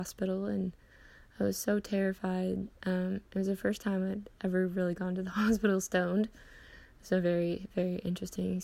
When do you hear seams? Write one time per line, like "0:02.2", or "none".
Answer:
none